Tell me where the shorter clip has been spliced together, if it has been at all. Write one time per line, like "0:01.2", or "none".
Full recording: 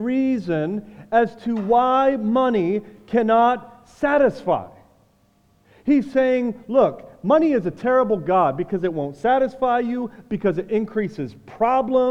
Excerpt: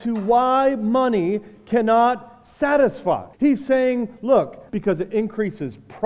0:03.3
0:04.7